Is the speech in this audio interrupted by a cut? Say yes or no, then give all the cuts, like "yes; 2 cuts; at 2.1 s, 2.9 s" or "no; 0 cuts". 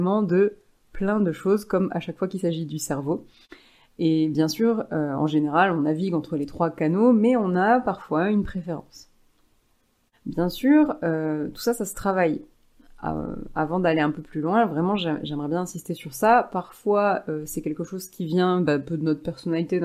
no; 0 cuts